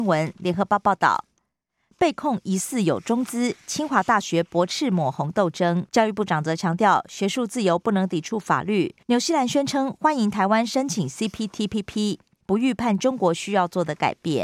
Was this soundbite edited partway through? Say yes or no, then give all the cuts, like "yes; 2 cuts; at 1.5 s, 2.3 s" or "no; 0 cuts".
yes; 3 cuts; at 5.9 s, 9.0 s, 12.4 s